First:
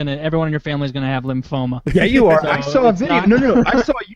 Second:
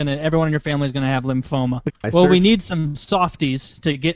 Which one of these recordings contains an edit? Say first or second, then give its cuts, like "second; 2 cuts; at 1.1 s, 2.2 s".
second; 1 cut; at 1.9 s